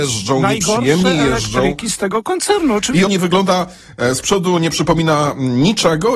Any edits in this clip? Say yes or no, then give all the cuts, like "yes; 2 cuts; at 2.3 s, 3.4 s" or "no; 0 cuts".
yes; 1 cut; at 3.1 s